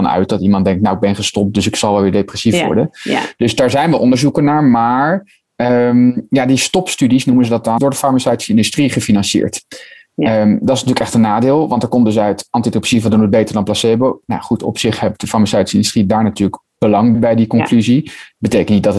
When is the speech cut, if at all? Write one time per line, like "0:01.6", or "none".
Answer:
0:07.8
0:17.1

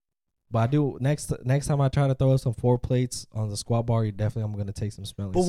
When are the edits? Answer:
none

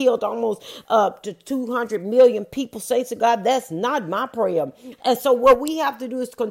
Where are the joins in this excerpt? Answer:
0:05.0

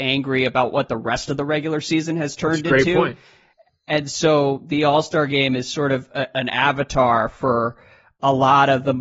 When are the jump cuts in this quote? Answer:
none

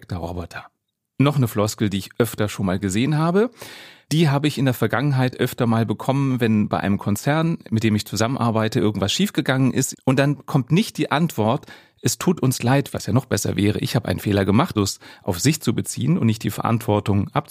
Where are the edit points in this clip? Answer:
0:09.9
0:12.9
0:14.7

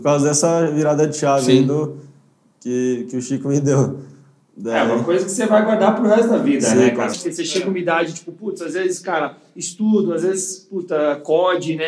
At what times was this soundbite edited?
0:07.1

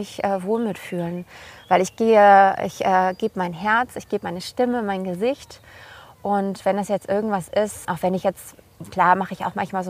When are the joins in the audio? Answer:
0:07.8

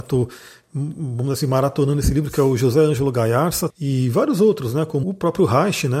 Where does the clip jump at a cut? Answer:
0:03.7
0:05.0

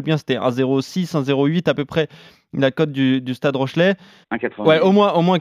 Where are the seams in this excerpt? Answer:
0:04.2

